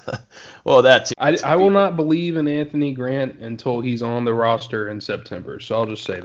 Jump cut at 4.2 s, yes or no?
no